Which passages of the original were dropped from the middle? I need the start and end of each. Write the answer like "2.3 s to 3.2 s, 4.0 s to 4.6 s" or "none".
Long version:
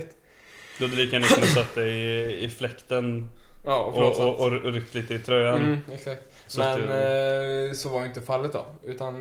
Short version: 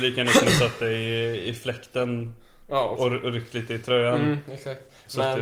3.9 s to 4.4 s

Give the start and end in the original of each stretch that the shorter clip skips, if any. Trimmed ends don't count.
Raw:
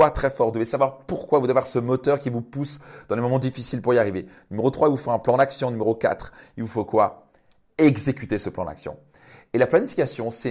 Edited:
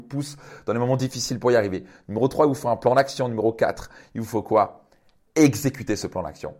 none

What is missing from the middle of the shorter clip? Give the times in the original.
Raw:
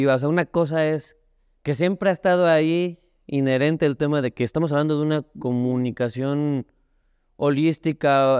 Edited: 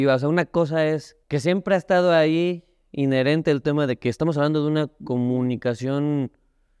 1.2 s to 1.6 s

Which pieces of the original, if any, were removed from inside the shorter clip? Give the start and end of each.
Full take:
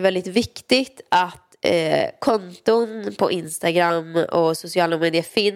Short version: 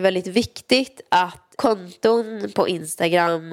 1.6 s to 2.2 s

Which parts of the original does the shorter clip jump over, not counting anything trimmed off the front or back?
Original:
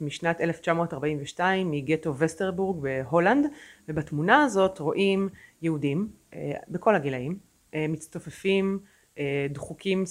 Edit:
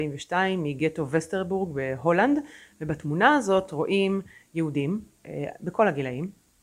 none

